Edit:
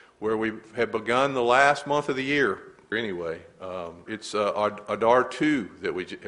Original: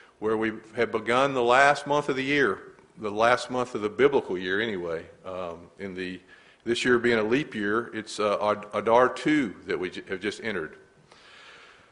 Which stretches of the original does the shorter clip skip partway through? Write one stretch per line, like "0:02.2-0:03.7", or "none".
0:02.9-0:04.6
0:05.7-0:07.9

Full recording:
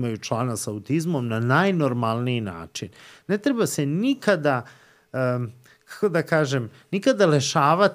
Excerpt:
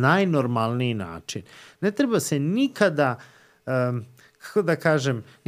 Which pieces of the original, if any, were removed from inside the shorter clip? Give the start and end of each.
none

